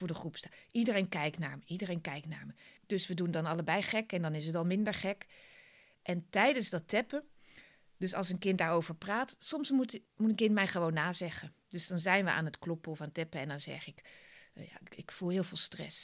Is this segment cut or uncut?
cut